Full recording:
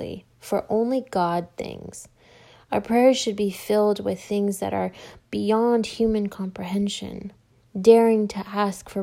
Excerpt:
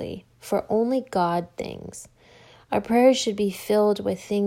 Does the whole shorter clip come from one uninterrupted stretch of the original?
yes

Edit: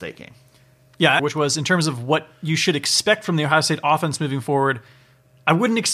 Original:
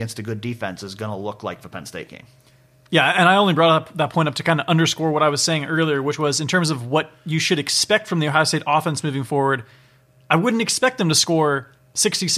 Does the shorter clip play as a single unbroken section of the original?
no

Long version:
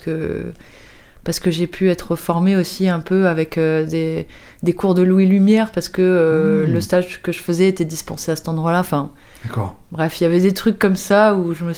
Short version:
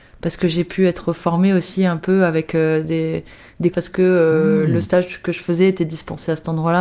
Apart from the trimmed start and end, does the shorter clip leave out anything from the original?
yes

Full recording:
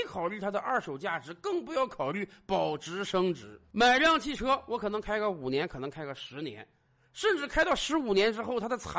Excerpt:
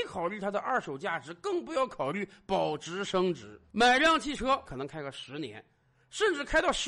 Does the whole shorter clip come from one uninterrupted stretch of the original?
no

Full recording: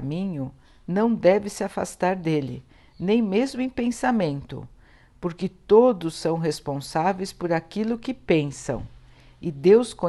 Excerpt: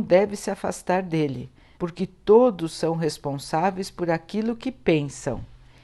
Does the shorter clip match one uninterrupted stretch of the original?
no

